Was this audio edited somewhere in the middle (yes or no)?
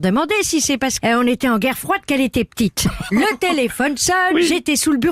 yes